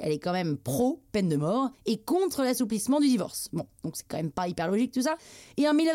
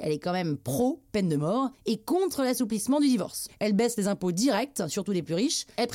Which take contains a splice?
second; 1 cut; at 3.5 s

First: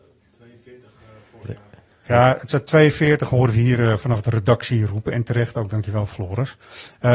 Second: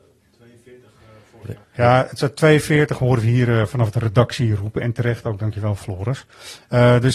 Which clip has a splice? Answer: second; 1 cut; at 1.6 s

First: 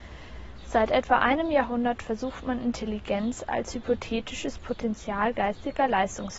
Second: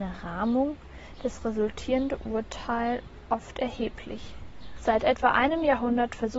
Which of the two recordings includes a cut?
second; 1 cut; at 4.8 s

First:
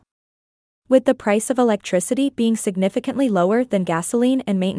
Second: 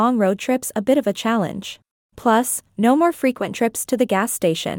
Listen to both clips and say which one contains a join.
second; 1 cut; at 2.0 s

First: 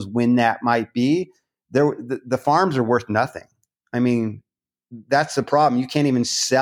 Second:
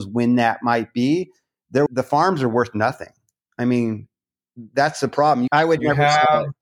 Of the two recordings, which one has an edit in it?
second; 2 cuts; at 1.9 s, 5.5 s

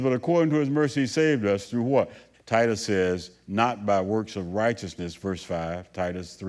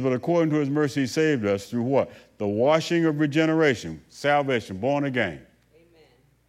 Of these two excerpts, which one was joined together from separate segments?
first; 1 cut; at 2.3 s

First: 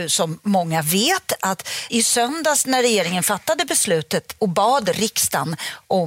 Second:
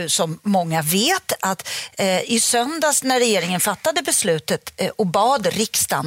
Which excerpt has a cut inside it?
first; 2 cuts; at 1.9 s, 4.4 s

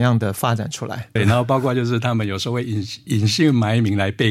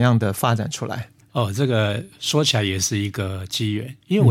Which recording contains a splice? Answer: first; 1 cut; at 1.2 s

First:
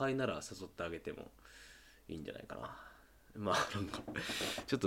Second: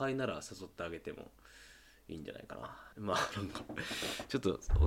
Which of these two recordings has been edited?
second; 1 cut; at 2.9 s

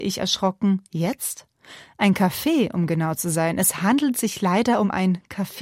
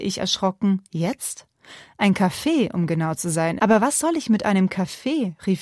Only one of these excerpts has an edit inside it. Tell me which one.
second; 1 cut; at 3.6 s

